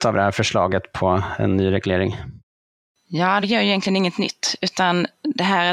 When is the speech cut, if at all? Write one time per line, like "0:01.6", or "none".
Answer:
0:03.4